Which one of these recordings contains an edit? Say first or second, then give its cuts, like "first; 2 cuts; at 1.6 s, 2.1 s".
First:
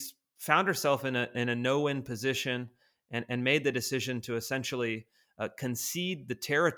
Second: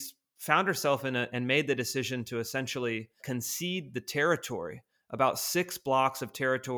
second; 2 cuts; at 1.3 s, 3.2 s